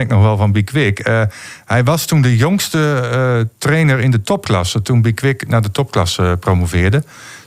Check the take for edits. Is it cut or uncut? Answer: uncut